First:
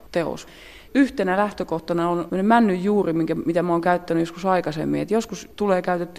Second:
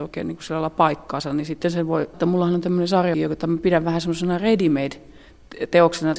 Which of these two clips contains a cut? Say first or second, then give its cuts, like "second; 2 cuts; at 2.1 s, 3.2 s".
second; 2 cuts; at 2.1 s, 3.1 s